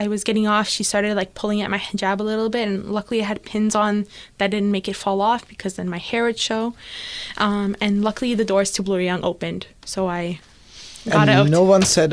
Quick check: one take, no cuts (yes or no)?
yes